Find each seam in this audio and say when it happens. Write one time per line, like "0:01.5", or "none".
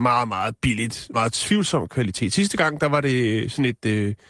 0:01.1

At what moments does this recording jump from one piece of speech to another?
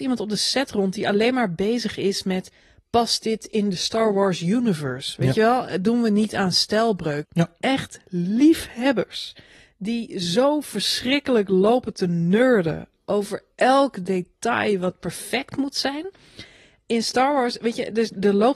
0:07.2

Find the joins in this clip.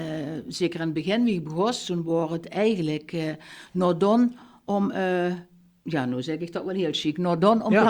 none

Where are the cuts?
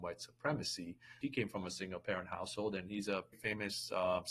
0:01.2
0:03.3

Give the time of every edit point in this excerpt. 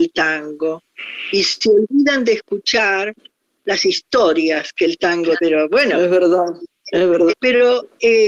0:05.4
0:07.3

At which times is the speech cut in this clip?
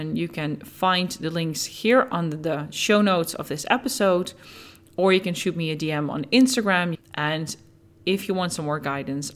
0:06.9

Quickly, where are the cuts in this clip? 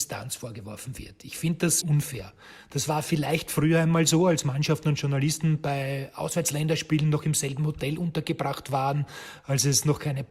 0:01.8

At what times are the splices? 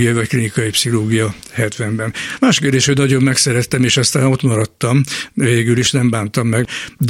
0:02.4

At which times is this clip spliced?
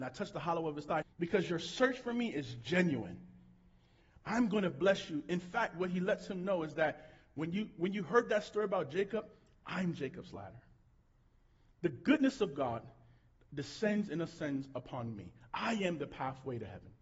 0:01.0

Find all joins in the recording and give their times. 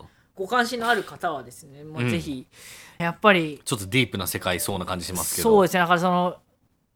0:03.0

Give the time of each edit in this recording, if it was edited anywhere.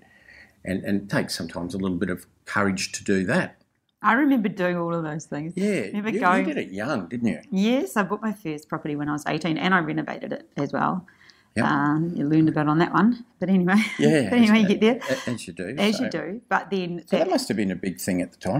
none

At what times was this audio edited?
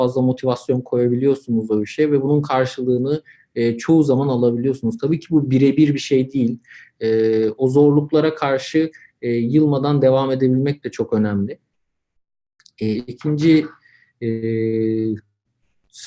0:06.9
0:12.9

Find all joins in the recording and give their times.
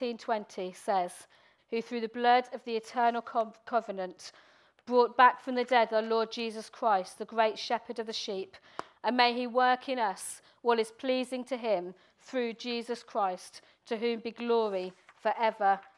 0:01.6
0:08.9

